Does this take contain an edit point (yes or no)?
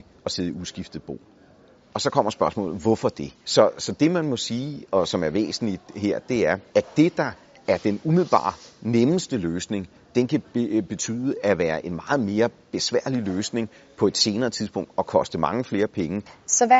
yes